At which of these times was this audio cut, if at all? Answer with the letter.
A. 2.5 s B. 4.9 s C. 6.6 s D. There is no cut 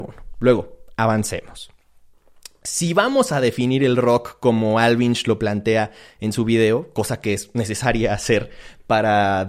D